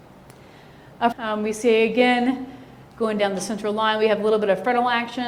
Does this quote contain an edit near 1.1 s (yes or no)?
yes